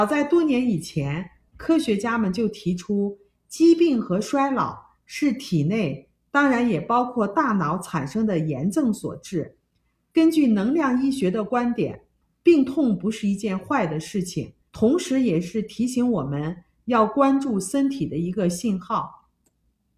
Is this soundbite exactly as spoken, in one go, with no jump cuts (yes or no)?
no